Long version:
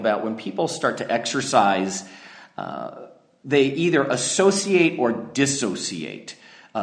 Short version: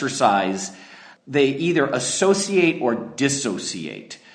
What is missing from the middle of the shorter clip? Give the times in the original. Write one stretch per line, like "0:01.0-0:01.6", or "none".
0:02.5-0:03.3